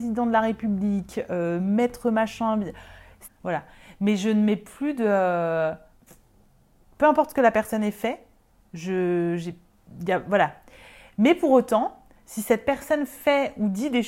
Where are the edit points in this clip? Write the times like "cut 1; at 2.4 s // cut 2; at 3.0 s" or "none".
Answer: cut 1; at 3.2 s